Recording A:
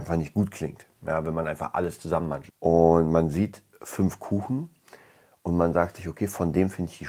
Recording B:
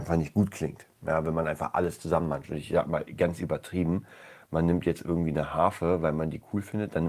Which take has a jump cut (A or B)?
A